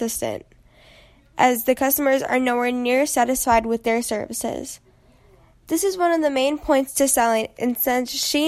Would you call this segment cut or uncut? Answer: uncut